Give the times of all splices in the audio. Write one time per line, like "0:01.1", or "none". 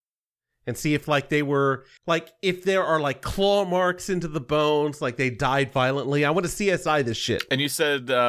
none

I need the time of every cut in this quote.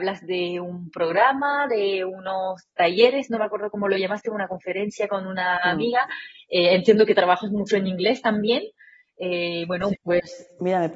0:10.0

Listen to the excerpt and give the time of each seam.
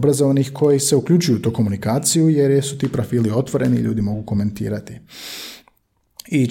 none

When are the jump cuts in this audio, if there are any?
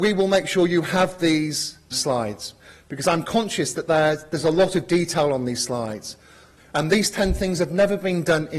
0:01.9
0:06.6

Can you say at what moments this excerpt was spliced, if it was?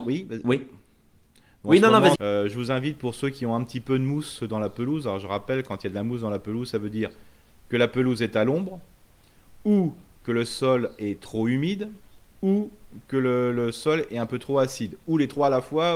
0:02.2

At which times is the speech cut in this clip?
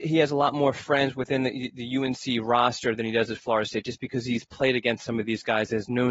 none

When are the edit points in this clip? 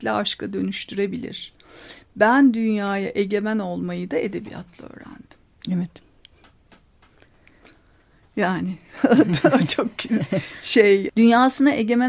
0:11.1

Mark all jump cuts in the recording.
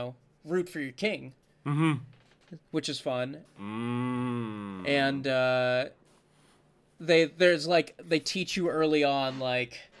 0:03.4

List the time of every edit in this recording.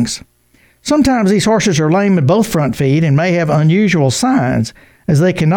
none

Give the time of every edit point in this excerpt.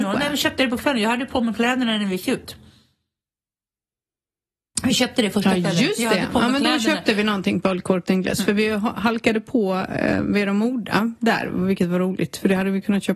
none

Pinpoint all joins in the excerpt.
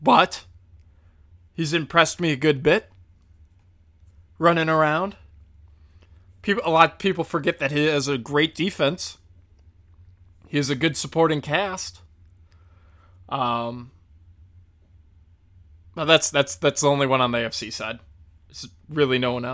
none

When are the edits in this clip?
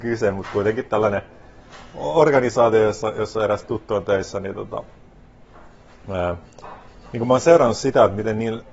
none

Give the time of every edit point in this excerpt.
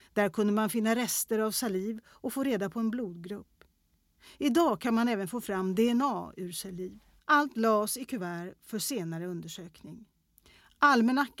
none

